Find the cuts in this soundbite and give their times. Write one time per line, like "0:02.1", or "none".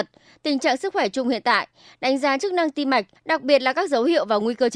0:03.2